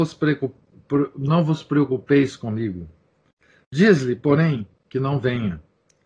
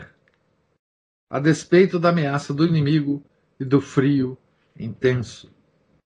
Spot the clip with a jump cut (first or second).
first